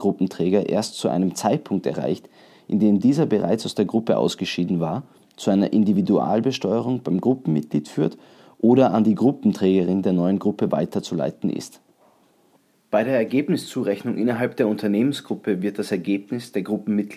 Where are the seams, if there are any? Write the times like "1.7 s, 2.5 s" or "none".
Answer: none